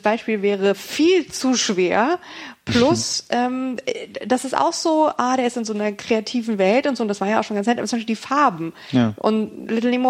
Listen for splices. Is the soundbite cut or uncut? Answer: uncut